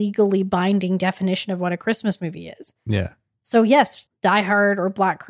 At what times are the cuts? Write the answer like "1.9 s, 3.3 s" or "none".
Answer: 4.1 s